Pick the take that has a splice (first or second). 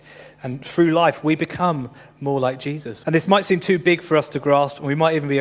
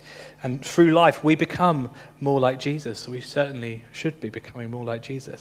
first